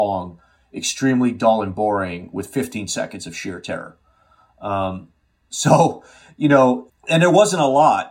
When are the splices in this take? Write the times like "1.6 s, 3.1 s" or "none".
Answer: 6.9 s